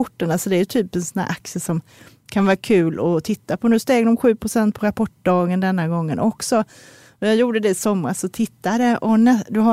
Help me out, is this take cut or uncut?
uncut